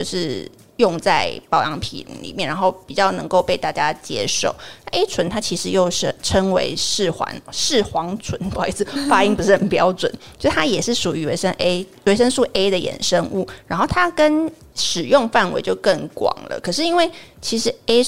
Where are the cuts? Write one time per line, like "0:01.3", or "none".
0:14.7